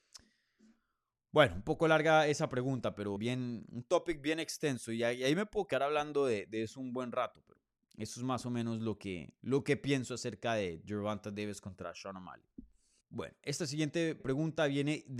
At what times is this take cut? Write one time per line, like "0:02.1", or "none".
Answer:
0:03.2
0:13.0
0:14.2